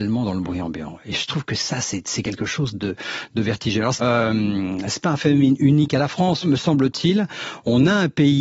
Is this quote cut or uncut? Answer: cut